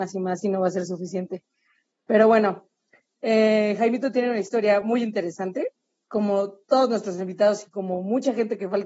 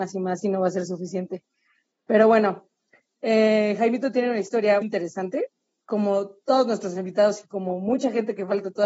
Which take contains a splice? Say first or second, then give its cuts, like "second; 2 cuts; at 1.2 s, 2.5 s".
second; 1 cut; at 4.8 s